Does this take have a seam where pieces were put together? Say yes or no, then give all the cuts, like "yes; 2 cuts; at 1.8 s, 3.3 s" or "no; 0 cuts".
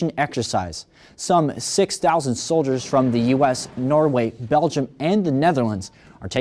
no; 0 cuts